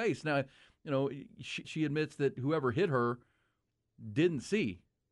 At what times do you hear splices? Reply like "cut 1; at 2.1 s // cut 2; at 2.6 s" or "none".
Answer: cut 1; at 1.6 s